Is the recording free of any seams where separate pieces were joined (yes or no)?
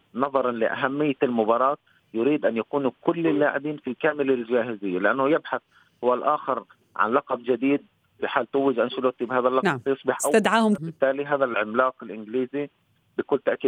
no